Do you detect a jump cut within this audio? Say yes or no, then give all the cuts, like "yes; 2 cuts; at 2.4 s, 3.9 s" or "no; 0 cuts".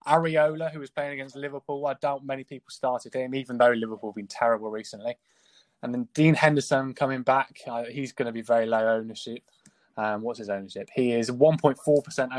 no; 0 cuts